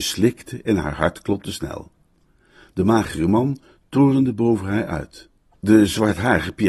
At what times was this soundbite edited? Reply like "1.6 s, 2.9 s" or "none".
none